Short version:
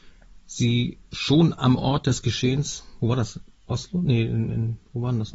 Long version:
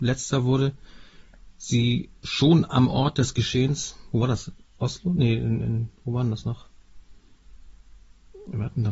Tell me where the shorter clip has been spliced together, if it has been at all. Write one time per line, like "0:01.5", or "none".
none